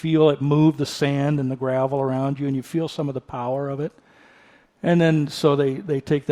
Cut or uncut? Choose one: uncut